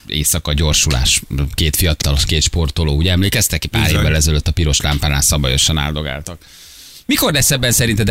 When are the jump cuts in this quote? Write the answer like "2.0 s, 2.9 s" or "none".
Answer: 2.0 s